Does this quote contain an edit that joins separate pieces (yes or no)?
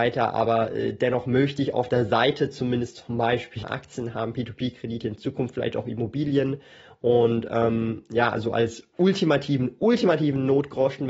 yes